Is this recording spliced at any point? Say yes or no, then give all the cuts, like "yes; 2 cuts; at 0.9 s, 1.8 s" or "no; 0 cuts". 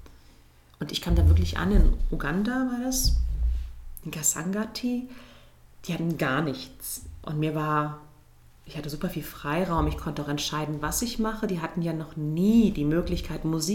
no; 0 cuts